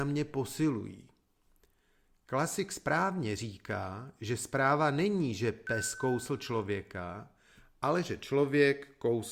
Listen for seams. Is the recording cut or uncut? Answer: uncut